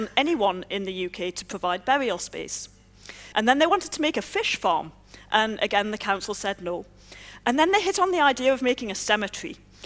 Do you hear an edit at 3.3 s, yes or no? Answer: yes